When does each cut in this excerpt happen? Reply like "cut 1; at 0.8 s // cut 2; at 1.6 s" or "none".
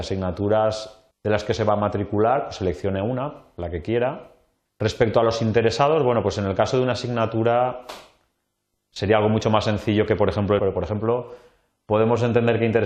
cut 1; at 1.1 s // cut 2; at 4.7 s // cut 3; at 10.6 s